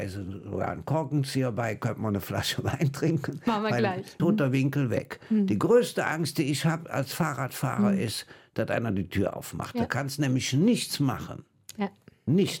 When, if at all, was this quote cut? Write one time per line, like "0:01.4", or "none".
0:04.2